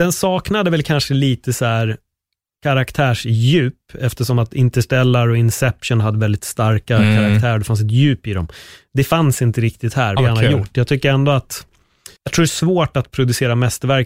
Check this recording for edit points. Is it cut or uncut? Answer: cut